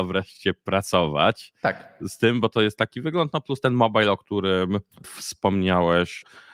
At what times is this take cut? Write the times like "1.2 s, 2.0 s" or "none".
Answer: 4.9 s

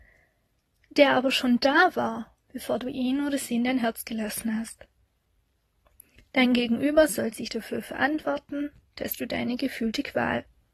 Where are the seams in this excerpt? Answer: none

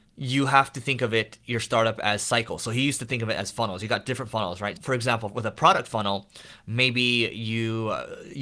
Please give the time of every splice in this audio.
none

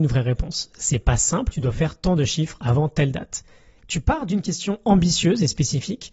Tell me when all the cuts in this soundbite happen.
1.5 s, 3.8 s

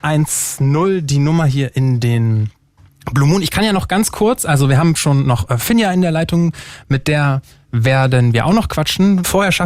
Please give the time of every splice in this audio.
none

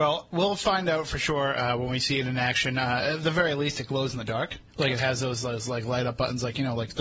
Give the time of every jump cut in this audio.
4.7 s

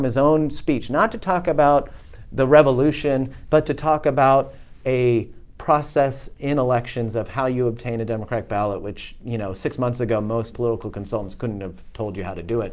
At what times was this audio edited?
3.5 s, 10.5 s

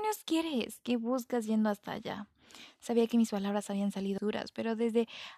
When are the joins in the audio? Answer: 4.2 s

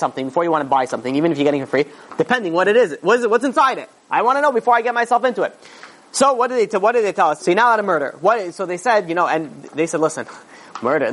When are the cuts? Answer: 7.4 s

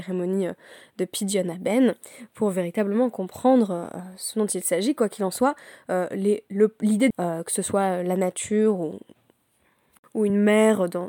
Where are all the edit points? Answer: 7.1 s

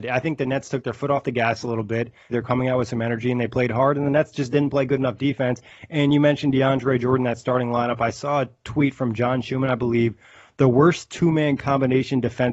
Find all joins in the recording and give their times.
2.3 s

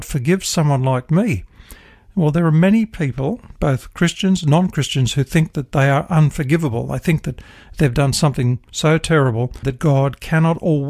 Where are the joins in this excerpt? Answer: 9.6 s

